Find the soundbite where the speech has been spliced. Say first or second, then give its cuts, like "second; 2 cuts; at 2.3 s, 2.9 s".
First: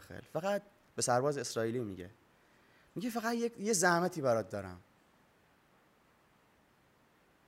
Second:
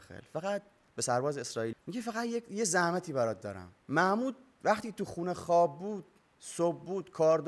second; 2 cuts; at 1.7 s, 3.8 s